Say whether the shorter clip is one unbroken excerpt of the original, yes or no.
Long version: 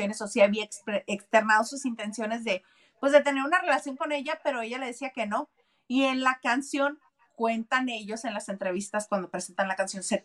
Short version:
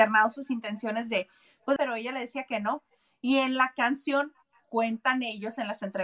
no